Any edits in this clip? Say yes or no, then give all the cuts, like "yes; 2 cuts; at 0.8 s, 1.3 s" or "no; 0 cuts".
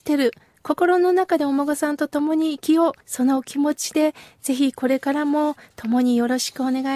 yes; 1 cut; at 3.0 s